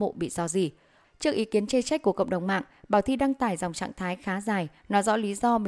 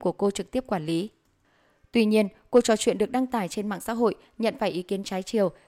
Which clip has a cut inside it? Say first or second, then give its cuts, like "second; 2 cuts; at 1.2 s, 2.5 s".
first; 1 cut; at 1.0 s